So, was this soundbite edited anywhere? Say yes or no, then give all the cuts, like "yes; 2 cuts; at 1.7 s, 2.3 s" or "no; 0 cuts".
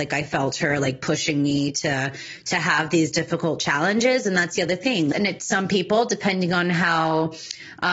yes; 1 cut; at 5.1 s